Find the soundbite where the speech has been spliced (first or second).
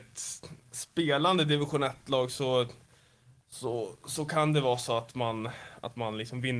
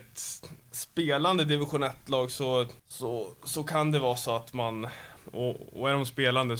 second